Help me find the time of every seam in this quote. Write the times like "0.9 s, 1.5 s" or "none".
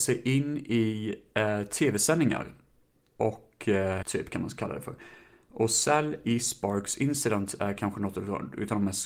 4.0 s